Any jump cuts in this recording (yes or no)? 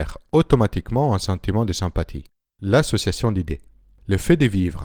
yes